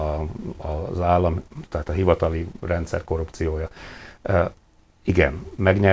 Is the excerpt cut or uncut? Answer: uncut